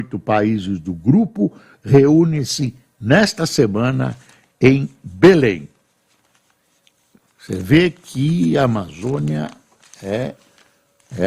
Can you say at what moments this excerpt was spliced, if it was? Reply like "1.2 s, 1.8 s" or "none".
none